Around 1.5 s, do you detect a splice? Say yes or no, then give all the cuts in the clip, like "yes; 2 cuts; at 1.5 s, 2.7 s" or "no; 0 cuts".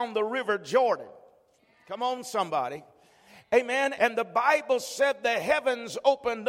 no; 1 cut; at 4.0 s